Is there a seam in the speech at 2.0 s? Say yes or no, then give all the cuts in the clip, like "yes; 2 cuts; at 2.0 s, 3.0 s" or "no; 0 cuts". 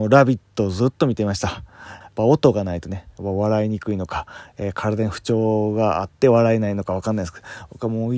yes; 1 cut; at 2.0 s